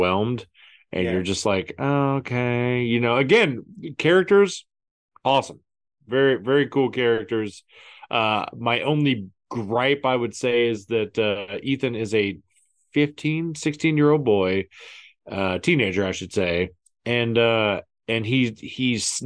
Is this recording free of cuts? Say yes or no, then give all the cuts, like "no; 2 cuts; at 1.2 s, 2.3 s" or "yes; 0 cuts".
yes; 0 cuts